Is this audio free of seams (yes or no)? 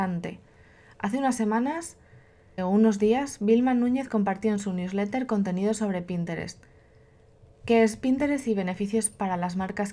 no